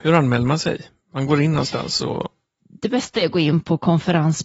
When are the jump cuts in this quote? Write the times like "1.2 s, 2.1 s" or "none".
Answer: none

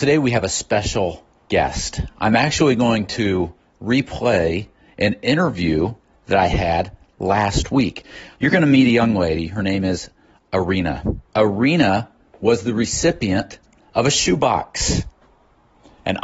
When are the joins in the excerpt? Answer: 8.3 s, 11.3 s

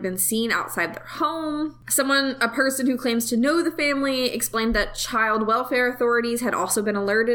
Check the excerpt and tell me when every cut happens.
none

